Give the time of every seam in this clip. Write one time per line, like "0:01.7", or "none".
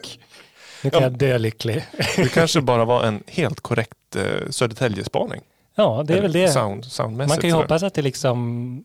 none

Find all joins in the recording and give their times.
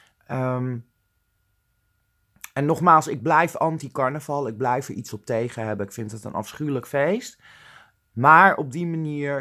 none

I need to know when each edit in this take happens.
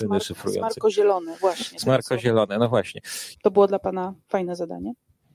0:03.3

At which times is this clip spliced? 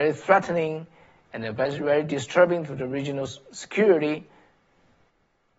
none

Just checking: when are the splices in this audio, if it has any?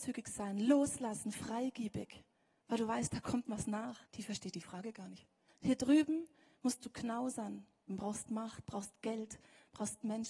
0:04.0
0:05.5
0:07.9

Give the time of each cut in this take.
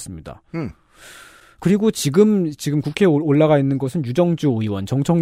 none

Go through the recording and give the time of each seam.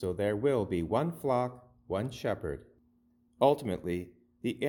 0:03.3

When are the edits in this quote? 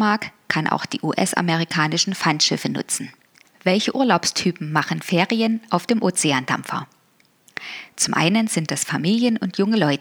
0:03.4

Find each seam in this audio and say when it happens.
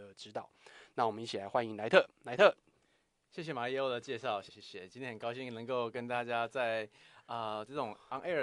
0:04.5

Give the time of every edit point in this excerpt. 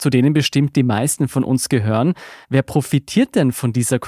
0:02.4

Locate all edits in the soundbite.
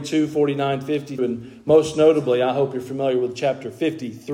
0:01.2

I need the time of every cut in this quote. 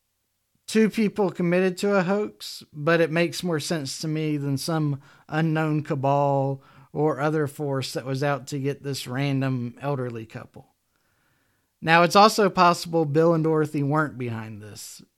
none

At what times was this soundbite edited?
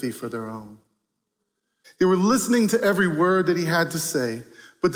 0:01.8

